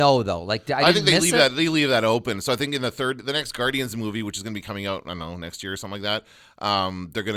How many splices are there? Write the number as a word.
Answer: zero